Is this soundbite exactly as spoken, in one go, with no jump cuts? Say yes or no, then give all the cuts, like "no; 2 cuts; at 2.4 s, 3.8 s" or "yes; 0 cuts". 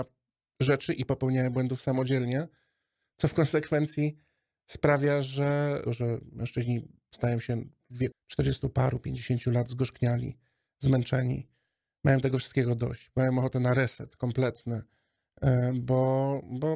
no; 2 cuts; at 5.8 s, 8.1 s